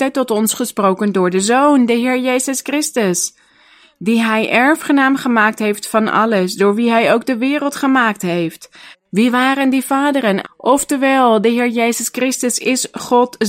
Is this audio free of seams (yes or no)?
no